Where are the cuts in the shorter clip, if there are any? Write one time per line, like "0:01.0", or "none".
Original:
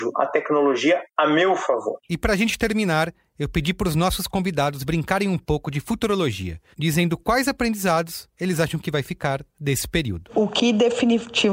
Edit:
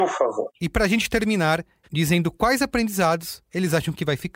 0:01.8